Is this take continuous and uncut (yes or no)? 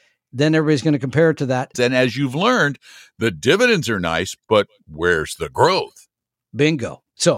no